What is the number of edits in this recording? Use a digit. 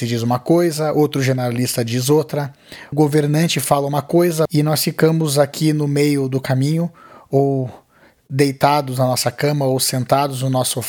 2